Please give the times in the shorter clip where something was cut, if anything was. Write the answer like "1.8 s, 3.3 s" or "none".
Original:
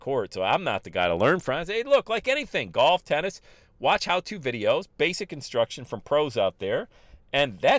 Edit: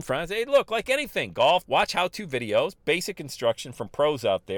1.6 s